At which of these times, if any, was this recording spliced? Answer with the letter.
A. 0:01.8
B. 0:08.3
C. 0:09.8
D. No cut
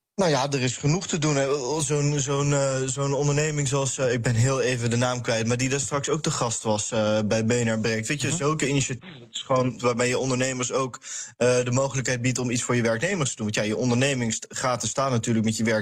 C